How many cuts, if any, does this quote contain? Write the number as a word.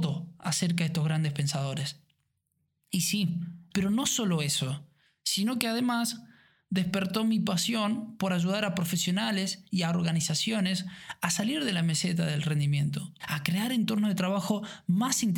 two